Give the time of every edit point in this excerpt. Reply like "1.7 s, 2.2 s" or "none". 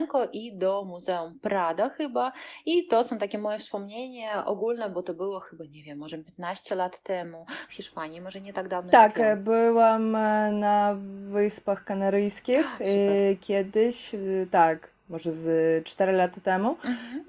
7.7 s